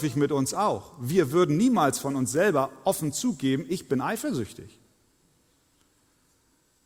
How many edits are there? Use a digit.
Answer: 0